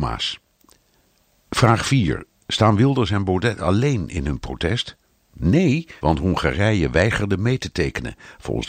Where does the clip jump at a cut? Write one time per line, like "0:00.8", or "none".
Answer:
0:06.0